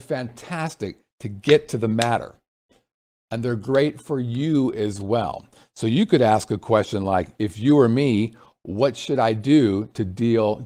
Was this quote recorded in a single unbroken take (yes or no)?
yes